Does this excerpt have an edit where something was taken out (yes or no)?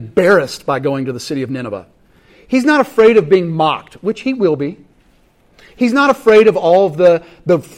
no